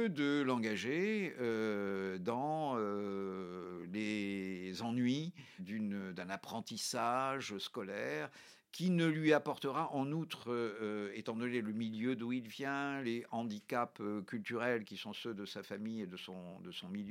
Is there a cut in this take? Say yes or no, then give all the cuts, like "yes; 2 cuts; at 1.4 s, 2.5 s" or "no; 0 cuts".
yes; 1 cut; at 5.6 s